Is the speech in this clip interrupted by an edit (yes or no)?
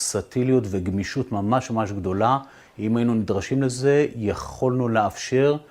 no